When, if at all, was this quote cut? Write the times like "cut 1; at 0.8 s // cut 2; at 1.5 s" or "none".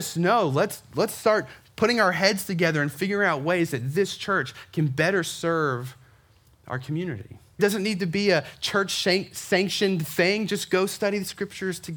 cut 1; at 7.6 s